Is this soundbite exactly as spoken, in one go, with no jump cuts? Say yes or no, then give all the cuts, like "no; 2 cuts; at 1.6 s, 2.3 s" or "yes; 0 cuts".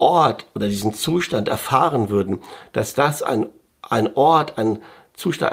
yes; 0 cuts